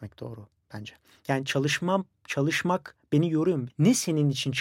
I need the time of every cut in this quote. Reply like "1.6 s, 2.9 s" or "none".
3.7 s